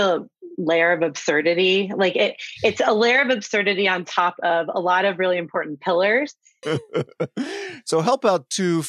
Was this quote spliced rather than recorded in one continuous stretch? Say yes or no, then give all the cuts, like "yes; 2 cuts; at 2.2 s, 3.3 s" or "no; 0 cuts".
yes; 1 cut; at 6.6 s